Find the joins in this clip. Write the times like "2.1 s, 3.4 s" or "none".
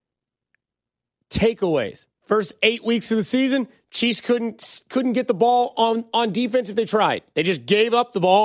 2.1 s